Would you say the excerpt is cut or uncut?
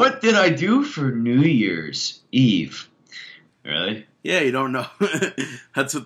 cut